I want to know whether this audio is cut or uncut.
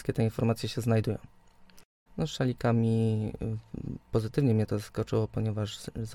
cut